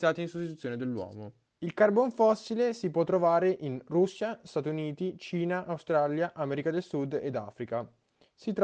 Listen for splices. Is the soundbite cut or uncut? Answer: cut